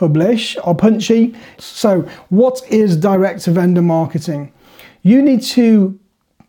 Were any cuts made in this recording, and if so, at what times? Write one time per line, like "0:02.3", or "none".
0:01.6